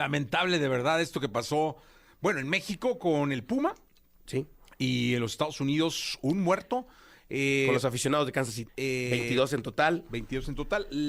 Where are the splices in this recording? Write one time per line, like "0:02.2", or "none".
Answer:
0:08.7